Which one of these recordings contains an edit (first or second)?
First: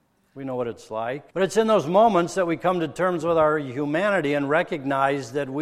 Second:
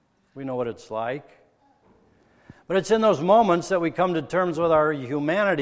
first